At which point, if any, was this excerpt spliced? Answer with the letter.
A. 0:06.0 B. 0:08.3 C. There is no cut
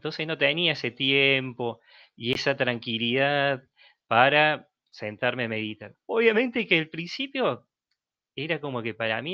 A